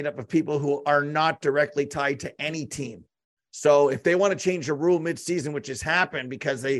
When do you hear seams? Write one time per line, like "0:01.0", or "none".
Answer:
none